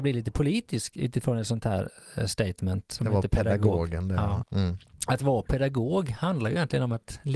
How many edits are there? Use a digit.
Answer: 2